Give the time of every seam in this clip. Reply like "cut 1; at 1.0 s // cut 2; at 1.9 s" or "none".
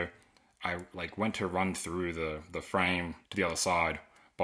cut 1; at 3.2 s